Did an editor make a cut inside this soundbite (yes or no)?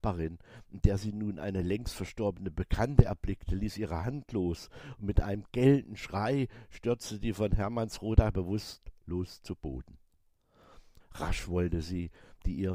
yes